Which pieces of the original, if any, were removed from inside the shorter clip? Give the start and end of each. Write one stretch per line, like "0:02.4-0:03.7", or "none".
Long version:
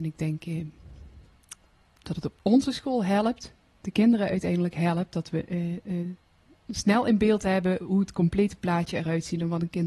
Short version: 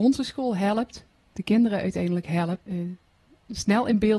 0:05.1-0:05.8